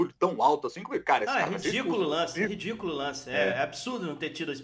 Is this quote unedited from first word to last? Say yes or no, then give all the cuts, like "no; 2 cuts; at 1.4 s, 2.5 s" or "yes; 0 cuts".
yes; 0 cuts